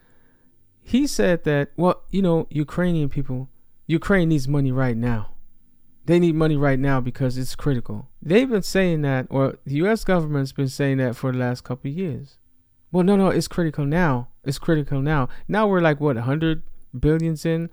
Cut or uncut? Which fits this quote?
cut